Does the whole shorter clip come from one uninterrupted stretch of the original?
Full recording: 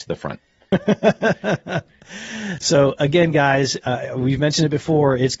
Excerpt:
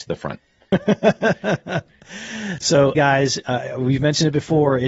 no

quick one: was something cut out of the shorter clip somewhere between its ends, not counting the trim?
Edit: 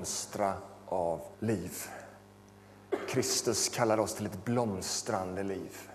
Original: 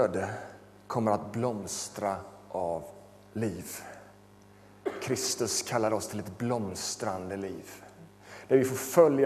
yes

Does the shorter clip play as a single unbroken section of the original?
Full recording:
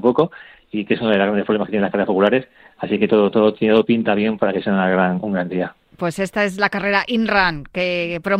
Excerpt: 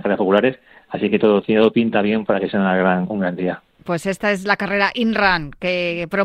no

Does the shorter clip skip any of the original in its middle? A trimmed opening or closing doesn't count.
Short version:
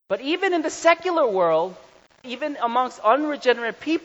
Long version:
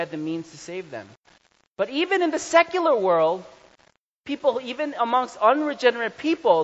yes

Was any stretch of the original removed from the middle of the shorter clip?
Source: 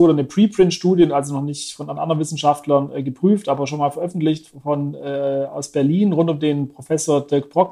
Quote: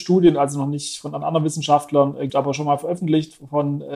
yes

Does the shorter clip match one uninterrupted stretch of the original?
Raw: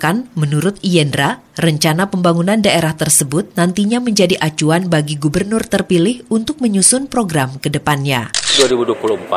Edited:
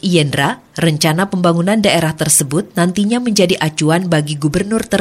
yes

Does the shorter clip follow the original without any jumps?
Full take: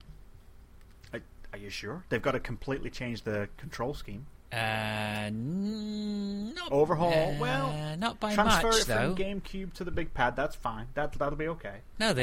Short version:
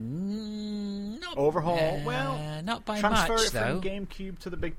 yes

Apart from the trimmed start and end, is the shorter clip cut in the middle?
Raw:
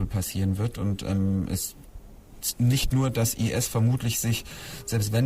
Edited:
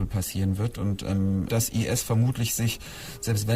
yes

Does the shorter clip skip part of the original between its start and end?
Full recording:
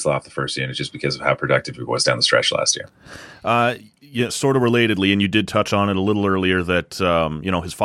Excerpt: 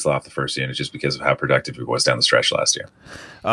no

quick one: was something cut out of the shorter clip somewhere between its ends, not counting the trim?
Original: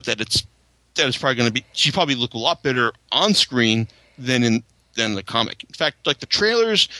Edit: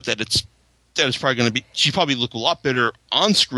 no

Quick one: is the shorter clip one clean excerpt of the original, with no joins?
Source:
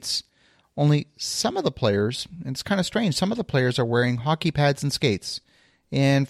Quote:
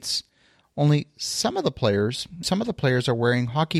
no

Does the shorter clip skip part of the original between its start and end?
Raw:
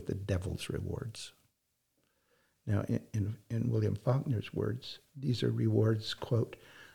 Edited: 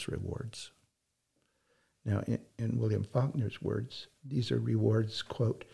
yes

